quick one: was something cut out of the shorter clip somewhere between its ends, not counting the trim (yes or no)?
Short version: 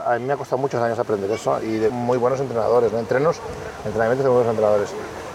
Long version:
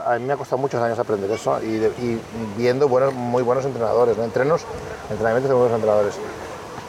yes